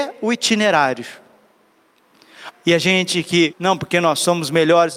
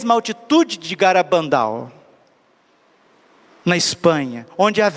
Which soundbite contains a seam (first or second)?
first